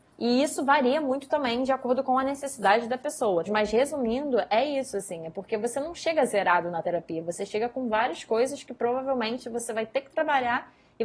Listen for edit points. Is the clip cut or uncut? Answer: cut